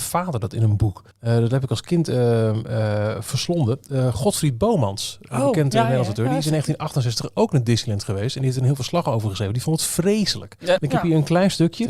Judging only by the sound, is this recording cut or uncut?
cut